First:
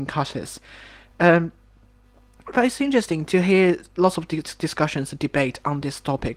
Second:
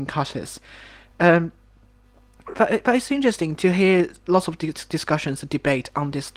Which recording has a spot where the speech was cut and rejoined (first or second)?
first